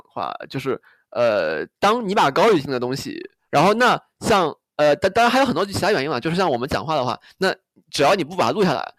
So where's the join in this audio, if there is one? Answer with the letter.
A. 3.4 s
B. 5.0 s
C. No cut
A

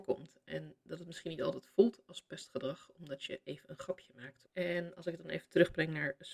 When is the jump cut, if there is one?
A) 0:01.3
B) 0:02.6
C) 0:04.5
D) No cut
C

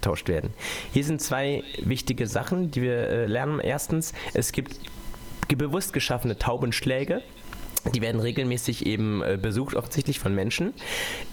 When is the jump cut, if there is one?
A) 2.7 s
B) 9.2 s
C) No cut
A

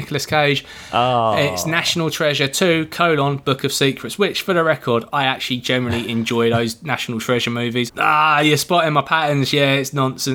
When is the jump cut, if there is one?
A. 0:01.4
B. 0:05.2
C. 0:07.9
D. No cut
C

